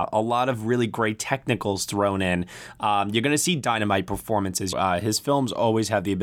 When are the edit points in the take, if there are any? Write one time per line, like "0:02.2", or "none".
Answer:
0:04.7

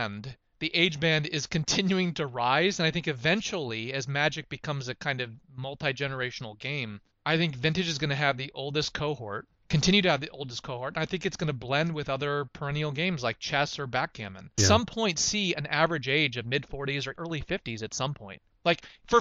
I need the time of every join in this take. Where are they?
0:14.6
0:17.2

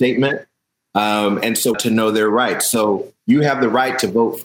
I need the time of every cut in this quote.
0:01.7

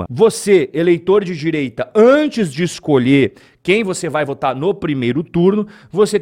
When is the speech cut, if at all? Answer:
none

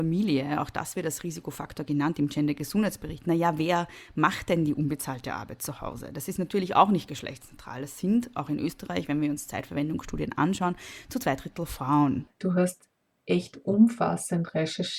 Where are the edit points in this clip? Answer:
0:12.3

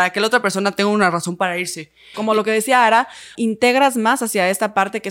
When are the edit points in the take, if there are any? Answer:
0:02.1
0:03.3

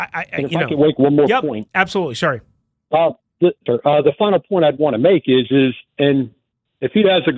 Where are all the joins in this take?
0:03.7
0:05.9

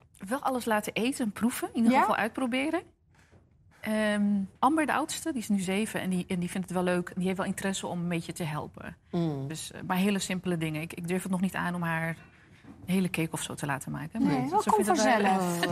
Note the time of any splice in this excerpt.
0:04.6

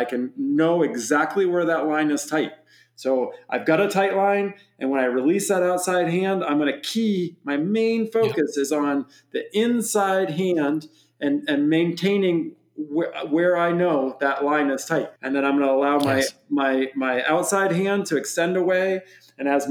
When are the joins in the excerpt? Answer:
0:15.2

